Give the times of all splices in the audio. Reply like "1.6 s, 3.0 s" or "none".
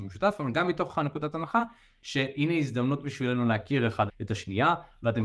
4.1 s